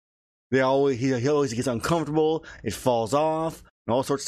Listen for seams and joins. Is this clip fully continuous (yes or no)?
yes